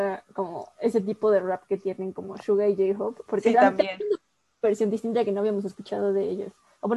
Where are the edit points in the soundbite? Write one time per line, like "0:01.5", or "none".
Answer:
none